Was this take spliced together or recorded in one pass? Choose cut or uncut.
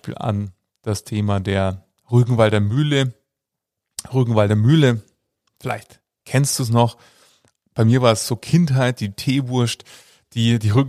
uncut